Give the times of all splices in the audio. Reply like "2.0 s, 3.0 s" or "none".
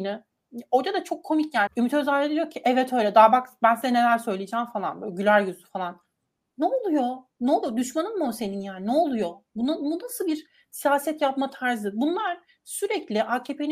1.7 s